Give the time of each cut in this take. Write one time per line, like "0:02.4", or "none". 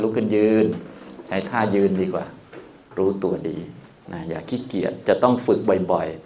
none

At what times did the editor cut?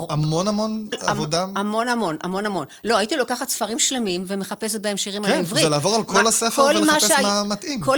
0:00.9

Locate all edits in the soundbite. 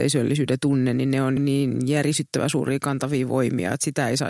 0:01.4

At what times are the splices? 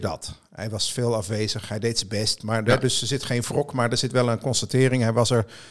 none

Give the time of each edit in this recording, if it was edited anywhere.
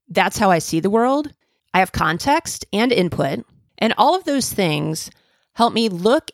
0:01.6
0:03.7

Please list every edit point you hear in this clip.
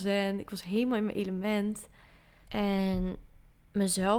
0:02.5

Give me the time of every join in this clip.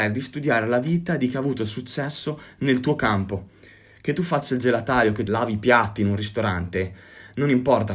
0:05.3

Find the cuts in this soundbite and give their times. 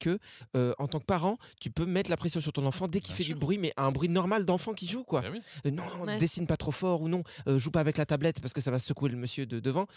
none

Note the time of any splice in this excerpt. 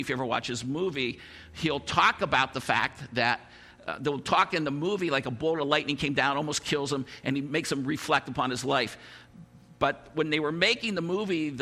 none

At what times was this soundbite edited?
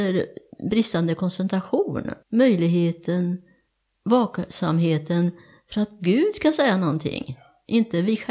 0:02.2

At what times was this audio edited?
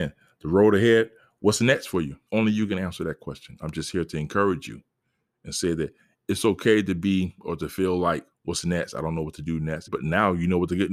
0:02.3
0:08.3
0:09.9

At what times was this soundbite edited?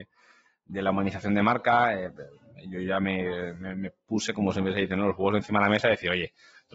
none

